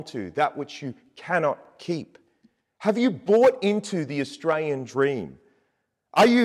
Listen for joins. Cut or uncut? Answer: uncut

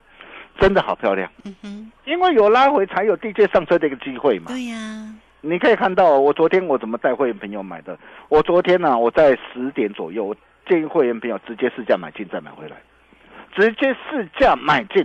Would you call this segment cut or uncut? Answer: uncut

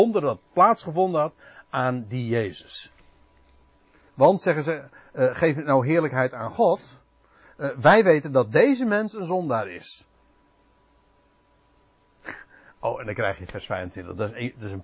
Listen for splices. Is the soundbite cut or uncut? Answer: uncut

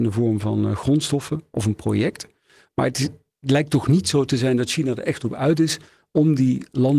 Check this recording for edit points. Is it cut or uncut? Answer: uncut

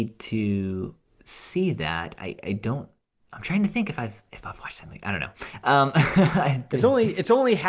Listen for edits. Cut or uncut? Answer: uncut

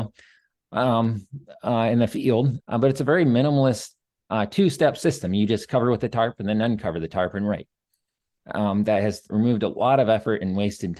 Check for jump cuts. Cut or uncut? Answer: cut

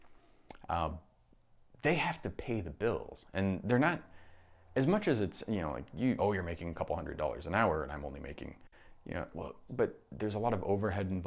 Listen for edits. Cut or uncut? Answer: cut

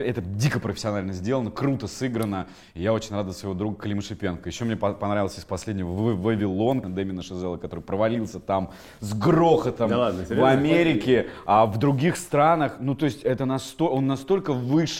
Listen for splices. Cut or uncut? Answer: cut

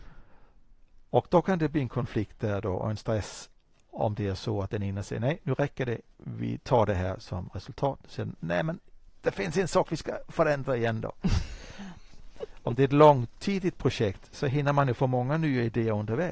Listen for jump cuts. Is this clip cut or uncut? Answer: uncut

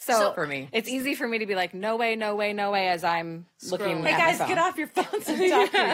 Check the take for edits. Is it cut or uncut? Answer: uncut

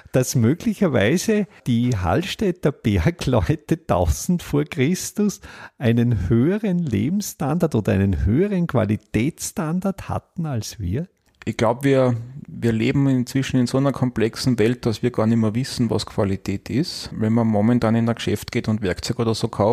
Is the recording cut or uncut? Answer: cut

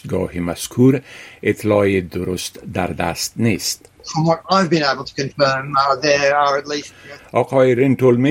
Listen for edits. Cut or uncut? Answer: cut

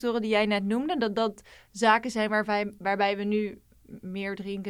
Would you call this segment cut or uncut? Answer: uncut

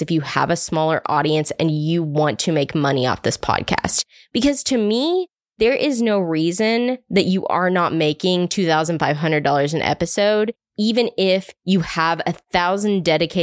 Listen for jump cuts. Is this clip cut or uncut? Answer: uncut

